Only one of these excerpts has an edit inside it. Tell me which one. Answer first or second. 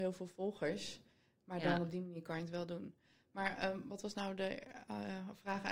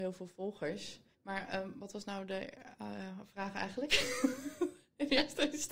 second